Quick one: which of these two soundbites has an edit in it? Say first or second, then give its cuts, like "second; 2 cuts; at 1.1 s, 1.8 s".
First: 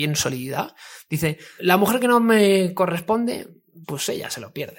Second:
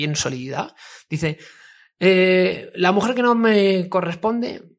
first; 2 cuts; at 1.6 s, 3.8 s